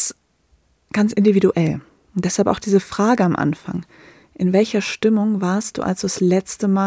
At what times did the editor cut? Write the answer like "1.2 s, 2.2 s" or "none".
none

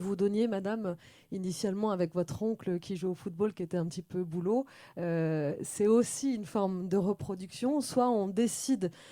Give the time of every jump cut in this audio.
none

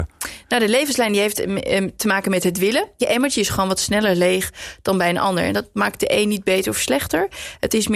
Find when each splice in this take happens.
3.0 s

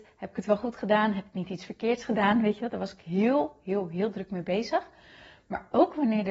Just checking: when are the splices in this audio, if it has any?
none

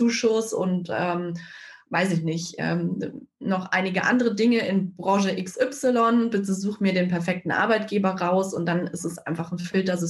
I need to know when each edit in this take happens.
none

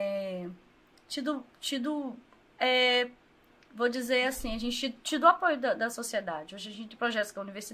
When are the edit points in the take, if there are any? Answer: none

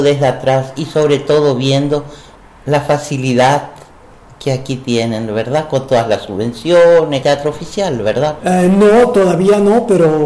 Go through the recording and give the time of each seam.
7.2 s, 8.4 s

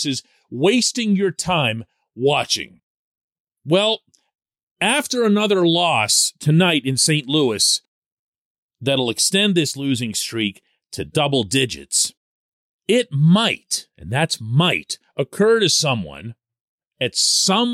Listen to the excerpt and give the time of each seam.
none

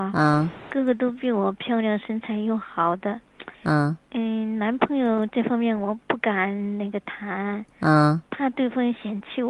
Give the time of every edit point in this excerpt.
3.5 s

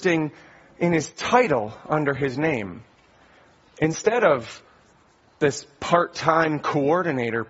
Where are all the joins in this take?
none

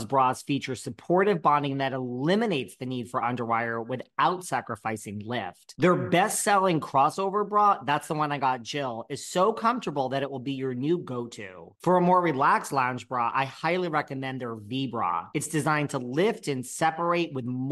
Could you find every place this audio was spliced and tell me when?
none

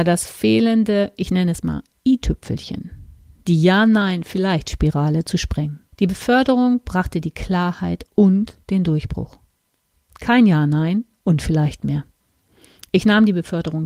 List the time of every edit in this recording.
5.9 s, 12.9 s

